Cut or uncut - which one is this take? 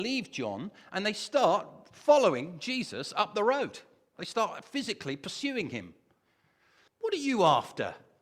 cut